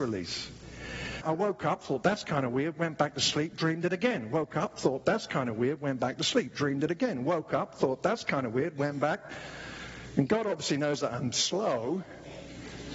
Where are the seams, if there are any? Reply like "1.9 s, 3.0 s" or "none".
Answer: 1.2 s